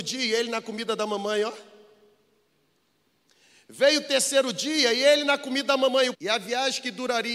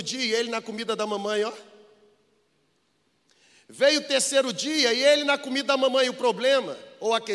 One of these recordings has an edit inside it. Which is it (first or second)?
first